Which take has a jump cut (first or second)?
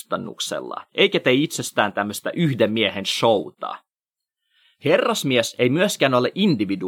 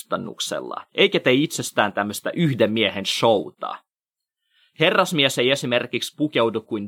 first